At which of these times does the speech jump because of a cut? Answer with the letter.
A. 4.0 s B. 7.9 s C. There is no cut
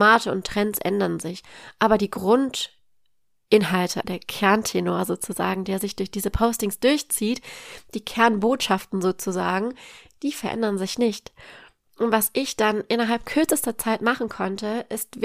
A